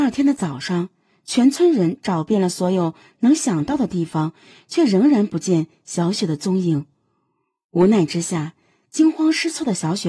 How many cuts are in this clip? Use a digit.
0